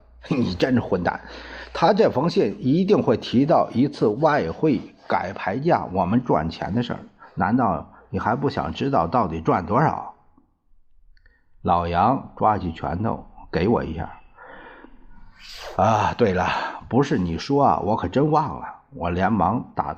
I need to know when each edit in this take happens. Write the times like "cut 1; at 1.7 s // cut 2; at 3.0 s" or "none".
none